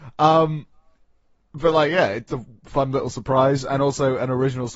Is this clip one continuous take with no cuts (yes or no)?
no